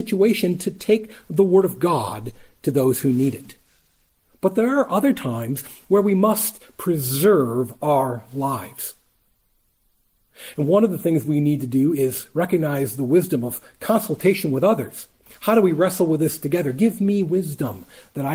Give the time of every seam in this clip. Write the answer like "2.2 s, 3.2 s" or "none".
none

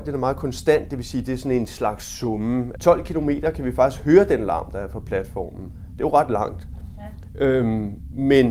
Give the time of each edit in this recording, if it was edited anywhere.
2.8 s

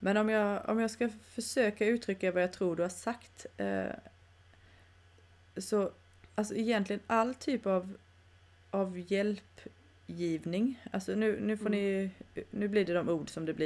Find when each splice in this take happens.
none

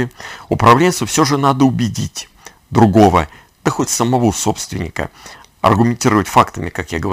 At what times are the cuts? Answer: 5.4 s

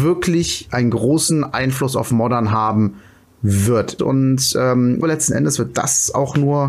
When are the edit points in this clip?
4.0 s, 5.0 s

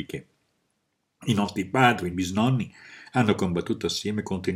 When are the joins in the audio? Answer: 2.1 s

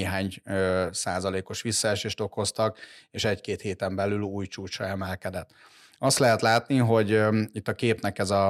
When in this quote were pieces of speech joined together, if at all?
none

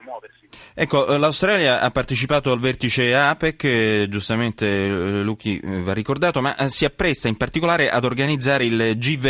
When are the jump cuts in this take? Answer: none

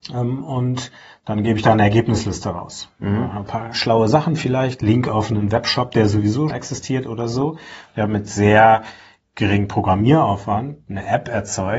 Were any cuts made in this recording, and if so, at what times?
6.5 s

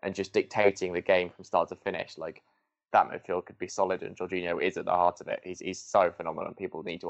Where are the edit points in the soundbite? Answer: none

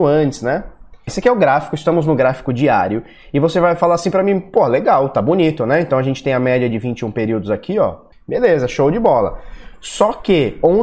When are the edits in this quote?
1.1 s, 8.1 s

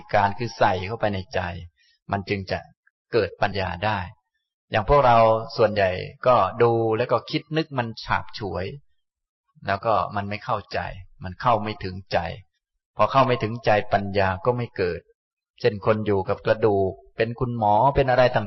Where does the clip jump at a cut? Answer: 3.5 s

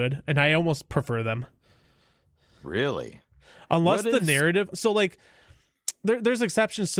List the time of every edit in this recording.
4.7 s

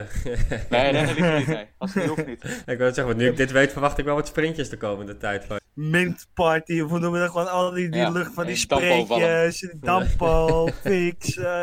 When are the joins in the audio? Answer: 2.6 s, 5.6 s

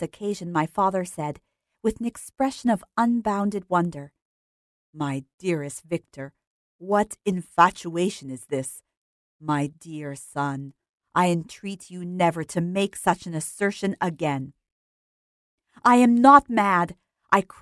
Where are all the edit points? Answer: none

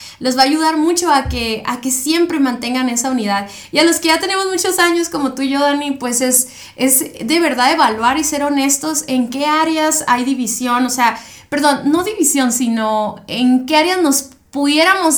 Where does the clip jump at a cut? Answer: none

